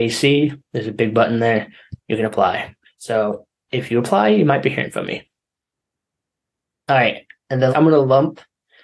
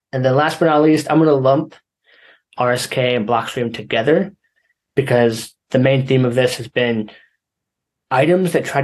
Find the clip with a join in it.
first; 2 cuts; at 2.8 s, 7.7 s

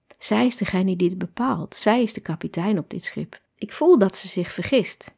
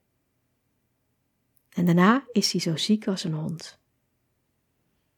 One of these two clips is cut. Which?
first; 1 cut; at 3.5 s

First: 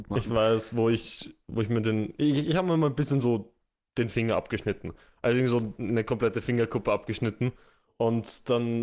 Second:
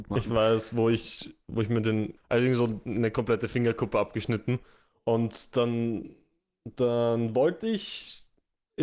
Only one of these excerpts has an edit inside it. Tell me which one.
second; 1 cut; at 2.2 s

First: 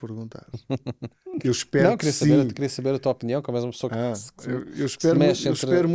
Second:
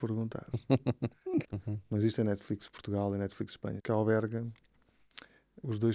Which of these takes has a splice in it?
second; 2 cuts; at 1.4 s, 3.8 s

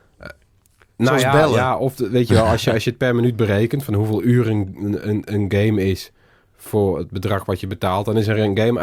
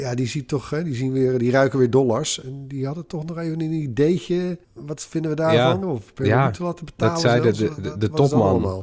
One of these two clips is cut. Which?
second; 2 cuts; at 4.6 s, 5.8 s

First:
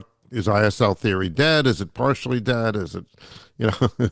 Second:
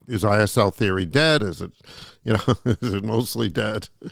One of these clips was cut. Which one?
second; 1 cut; at 1.4 s

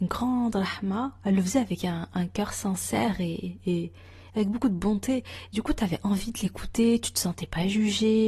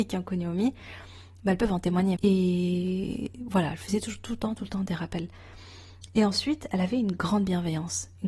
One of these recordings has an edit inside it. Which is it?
second; 1 cut; at 2.2 s

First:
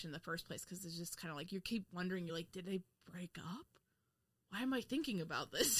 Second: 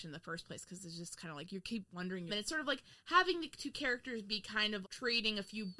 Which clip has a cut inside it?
second; 2 cuts; at 2.3 s, 4.8 s

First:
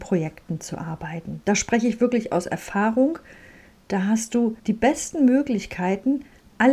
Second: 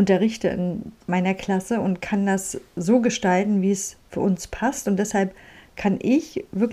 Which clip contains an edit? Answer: first; 2 cuts; at 1.4 s, 4.6 s

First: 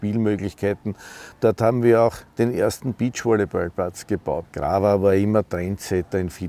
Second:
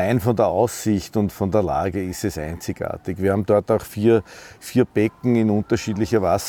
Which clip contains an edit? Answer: first; 1 cut; at 4.5 s

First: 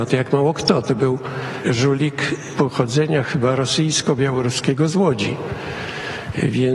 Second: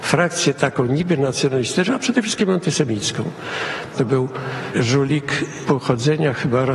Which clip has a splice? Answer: second; 1 cut; at 3.9 s

